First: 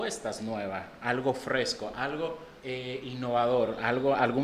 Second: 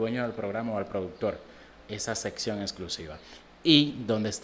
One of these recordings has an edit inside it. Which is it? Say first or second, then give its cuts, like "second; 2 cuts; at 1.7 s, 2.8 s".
first; 1 cut; at 2.6 s